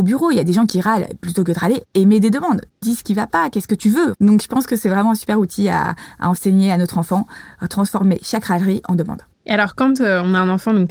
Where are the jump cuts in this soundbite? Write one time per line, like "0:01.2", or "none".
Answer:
none